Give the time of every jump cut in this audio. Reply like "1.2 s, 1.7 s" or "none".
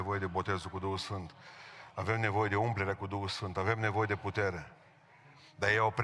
none